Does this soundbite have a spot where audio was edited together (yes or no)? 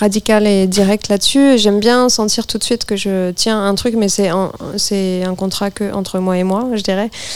no